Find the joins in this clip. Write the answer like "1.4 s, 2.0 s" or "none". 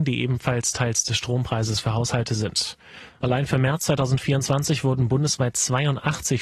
3.2 s